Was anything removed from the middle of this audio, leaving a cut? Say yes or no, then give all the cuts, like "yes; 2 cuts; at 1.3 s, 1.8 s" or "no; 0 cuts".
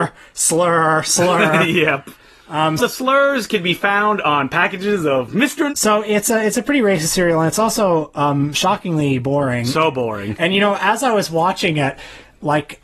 yes; 2 cuts; at 2.8 s, 5.7 s